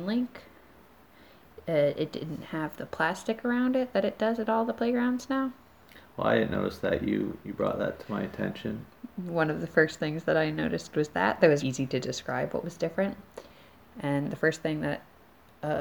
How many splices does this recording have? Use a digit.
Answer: 2